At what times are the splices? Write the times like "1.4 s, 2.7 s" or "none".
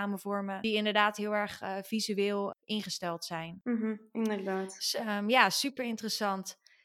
none